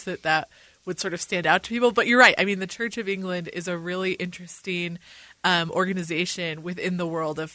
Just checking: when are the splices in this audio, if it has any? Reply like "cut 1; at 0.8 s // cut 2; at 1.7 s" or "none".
none

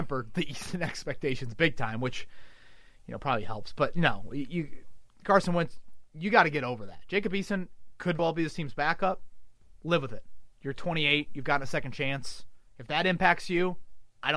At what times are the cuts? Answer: cut 1; at 8.2 s

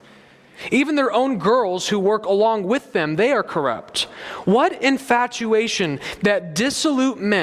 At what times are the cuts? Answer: none

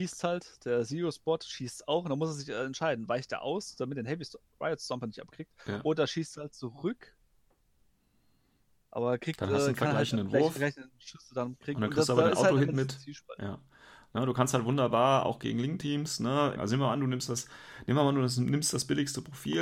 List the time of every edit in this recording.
cut 1; at 16.6 s

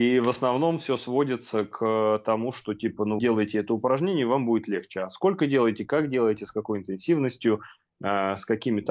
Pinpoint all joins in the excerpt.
cut 1; at 3.2 s

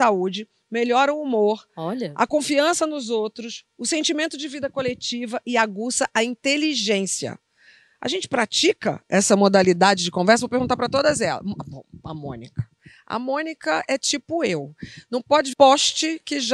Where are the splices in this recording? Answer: cut 1; at 15.5 s

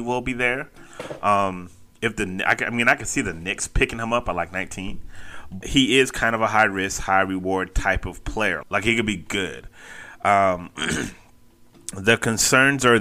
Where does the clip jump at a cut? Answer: cut 1; at 5.6 s // cut 2; at 8.6 s

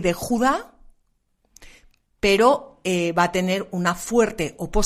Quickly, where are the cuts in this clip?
none

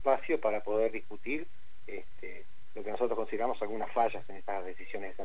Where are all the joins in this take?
none

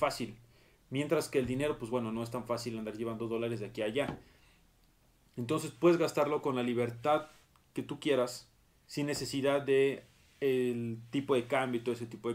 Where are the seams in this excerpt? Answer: none

